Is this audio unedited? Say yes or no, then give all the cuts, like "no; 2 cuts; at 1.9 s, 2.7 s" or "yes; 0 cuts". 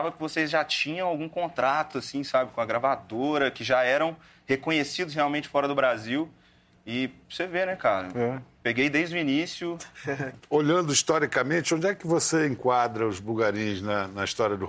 yes; 0 cuts